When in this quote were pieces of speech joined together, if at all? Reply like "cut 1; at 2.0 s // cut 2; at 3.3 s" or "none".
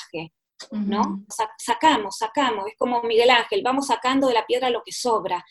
cut 1; at 1.3 s

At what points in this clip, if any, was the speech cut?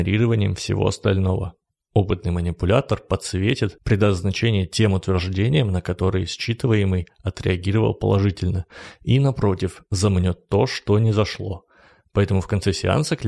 none

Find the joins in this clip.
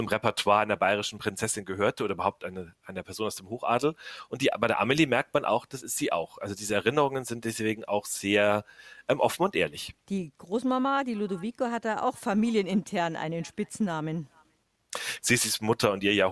cut 1; at 10.0 s // cut 2; at 15.2 s

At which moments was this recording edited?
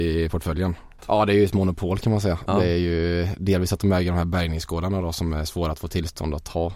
cut 1; at 1.0 s

